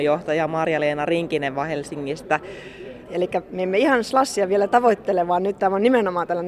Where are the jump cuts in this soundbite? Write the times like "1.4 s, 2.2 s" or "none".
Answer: 3.1 s